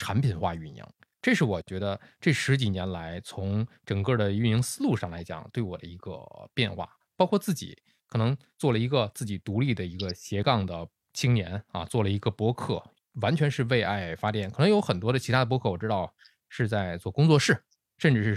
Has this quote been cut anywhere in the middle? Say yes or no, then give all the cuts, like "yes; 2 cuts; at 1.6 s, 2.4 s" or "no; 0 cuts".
no; 0 cuts